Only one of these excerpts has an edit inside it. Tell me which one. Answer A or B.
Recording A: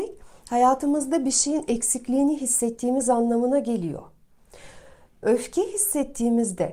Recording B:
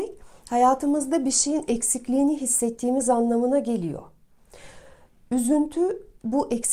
A